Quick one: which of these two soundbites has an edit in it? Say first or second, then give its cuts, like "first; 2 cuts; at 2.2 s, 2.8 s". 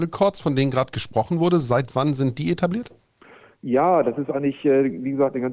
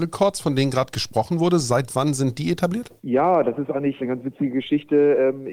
second; 2 cuts; at 3.0 s, 4.0 s